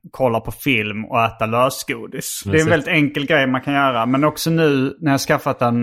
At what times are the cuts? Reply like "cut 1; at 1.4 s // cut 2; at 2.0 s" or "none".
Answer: cut 1; at 2.4 s